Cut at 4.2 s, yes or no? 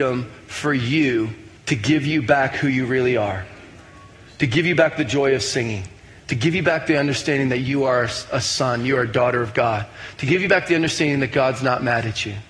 no